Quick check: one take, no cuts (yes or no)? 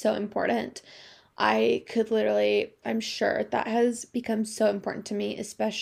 no